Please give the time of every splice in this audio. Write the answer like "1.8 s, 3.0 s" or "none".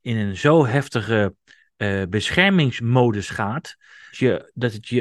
4.1 s